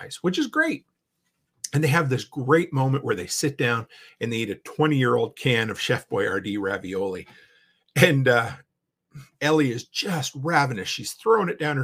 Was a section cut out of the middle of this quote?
no; 0 cuts

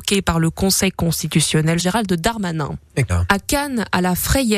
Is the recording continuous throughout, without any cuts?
no; 2 cuts; at 1.8 s, 3.1 s

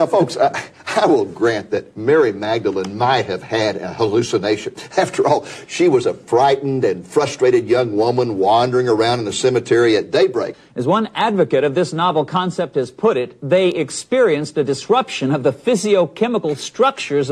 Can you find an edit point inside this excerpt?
yes; 1 cut; at 10.5 s

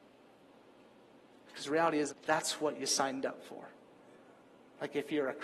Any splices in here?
yes; 1 cut; at 2.1 s

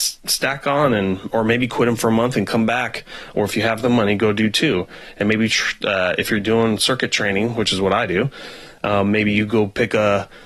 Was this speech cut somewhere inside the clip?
no; 0 cuts

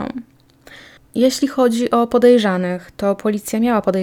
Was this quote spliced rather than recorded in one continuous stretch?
yes; 1 cut; at 1.0 s

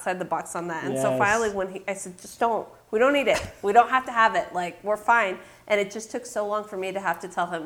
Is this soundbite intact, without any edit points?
yes; 0 cuts

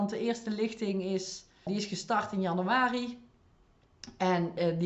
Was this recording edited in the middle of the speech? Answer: yes; 1 cut; at 1.7 s

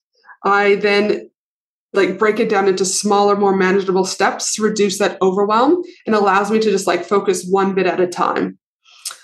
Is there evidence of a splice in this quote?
no; 0 cuts

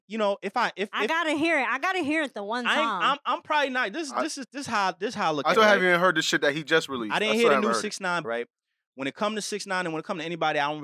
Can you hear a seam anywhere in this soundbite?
yes; 2 cuts; at 5.5 s, 8.2 s

